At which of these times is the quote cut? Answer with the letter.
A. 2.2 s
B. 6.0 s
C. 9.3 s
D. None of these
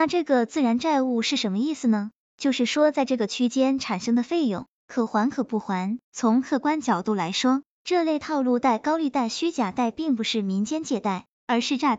B